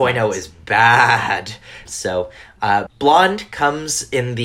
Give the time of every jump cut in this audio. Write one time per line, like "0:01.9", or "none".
0:01.9
0:02.9